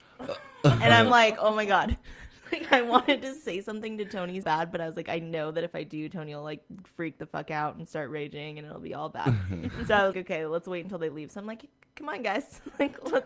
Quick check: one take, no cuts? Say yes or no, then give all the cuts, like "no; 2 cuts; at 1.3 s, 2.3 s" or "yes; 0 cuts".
no; 2 cuts; at 4.4 s, 10.1 s